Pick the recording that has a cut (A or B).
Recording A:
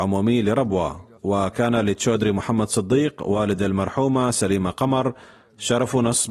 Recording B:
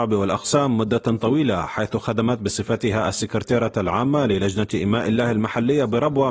A